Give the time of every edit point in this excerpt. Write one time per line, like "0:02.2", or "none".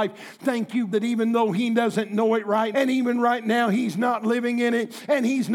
0:00.9
0:02.7